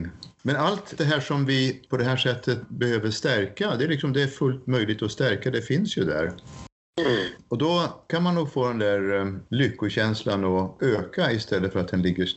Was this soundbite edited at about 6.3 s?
no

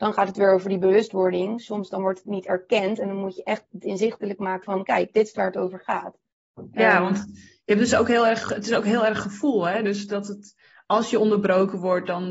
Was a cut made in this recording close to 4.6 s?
yes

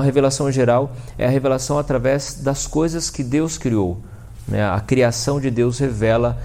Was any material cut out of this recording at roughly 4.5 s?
no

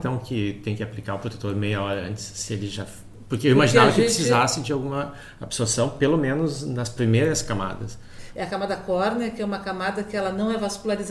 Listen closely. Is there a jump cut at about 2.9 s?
no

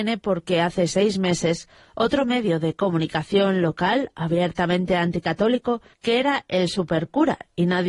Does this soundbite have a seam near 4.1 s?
no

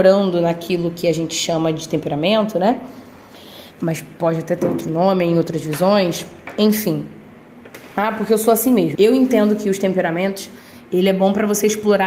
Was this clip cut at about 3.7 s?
no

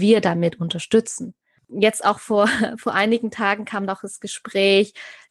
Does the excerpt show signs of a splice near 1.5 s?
no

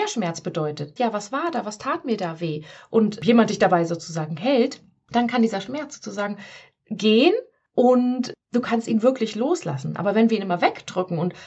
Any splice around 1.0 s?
yes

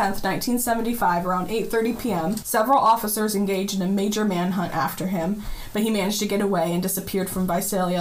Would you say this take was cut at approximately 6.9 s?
no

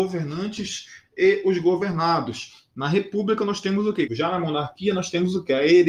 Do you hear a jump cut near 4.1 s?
yes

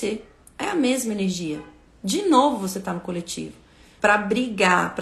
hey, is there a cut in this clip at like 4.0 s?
yes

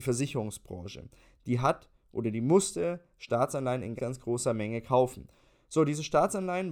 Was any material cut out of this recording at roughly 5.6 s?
no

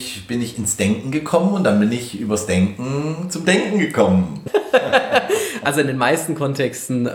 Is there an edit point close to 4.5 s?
yes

